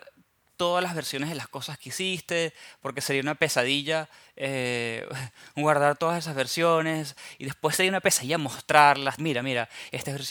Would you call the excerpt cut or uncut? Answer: cut